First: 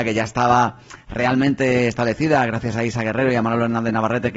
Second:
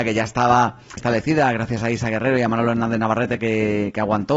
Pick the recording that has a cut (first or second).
second